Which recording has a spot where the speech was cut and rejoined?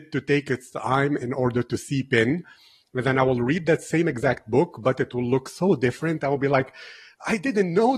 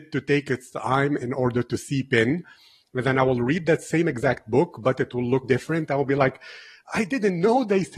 second; 1 cut; at 5.4 s

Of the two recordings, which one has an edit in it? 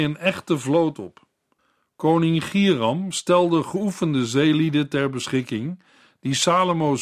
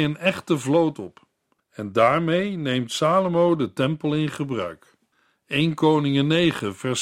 second; 1 cut; at 1.6 s

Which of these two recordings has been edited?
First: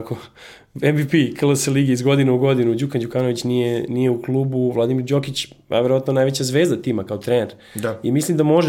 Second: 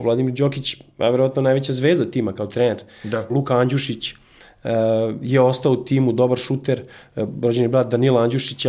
second; 1 cut; at 3.3 s

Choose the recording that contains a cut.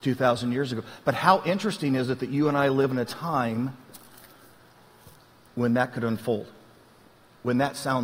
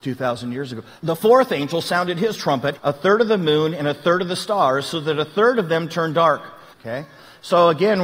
second; 3 cuts; at 1.0 s, 2.8 s, 6.7 s

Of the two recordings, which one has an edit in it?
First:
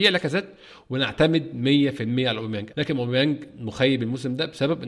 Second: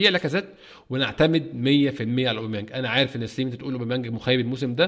first; 1 cut; at 2.7 s

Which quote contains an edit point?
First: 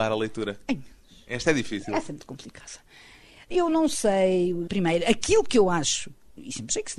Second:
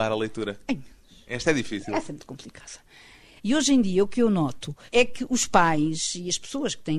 second; 2 cuts; at 3.4 s, 4.9 s

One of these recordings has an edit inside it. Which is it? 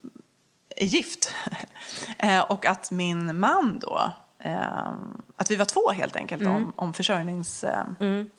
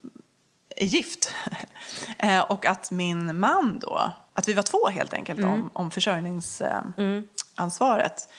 second; 1 cut; at 4.3 s

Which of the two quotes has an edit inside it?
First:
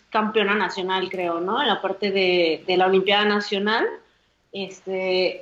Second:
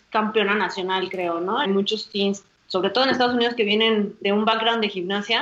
second; 1 cut; at 1.6 s

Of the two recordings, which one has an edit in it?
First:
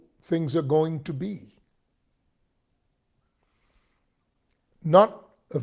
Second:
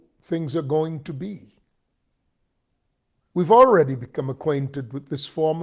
second; 1 cut; at 3.3 s

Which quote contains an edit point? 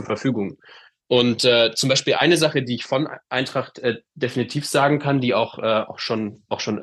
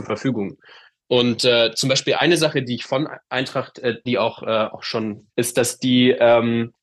second; 2 cuts; at 4.1 s, 5.3 s

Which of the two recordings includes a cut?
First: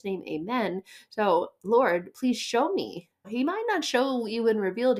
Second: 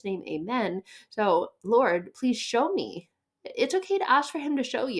first; 1 cut; at 3.2 s

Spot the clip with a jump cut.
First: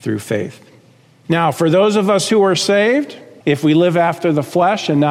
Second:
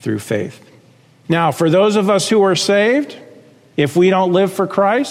first; 1 cut; at 3.4 s

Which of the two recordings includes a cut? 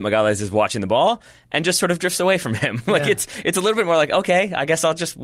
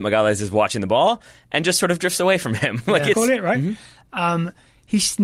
second; 1 cut; at 3.1 s

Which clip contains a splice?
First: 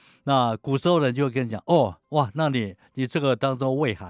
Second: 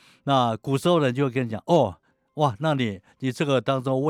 first; 1 cut; at 2.0 s

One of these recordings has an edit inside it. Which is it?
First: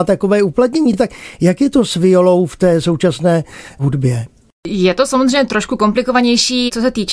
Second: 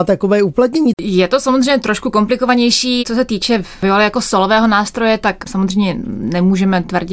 second; 1 cut; at 0.9 s

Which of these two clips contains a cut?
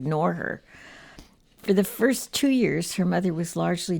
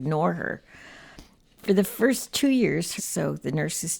second; 1 cut; at 3.0 s

